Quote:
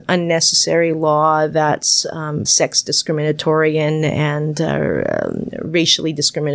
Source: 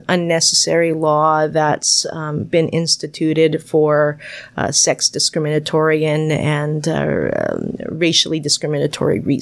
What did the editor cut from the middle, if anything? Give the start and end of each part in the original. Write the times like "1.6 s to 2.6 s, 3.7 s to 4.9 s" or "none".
2.4 s to 4.7 s